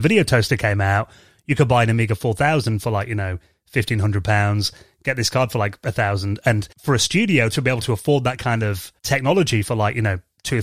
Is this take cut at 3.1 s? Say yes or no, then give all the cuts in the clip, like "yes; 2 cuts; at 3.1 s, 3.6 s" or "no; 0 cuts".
no; 2 cuts; at 6.7 s, 9.0 s